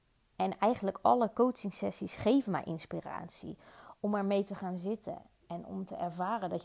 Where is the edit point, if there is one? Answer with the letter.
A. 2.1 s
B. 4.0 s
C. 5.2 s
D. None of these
B